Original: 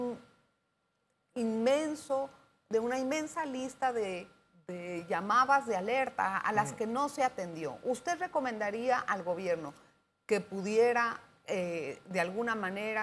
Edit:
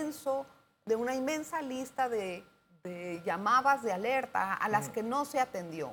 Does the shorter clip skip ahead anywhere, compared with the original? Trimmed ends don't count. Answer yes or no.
no